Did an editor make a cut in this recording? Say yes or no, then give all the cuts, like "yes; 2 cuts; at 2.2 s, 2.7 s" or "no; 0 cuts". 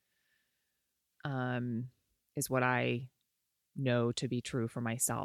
yes; 1 cut; at 1.1 s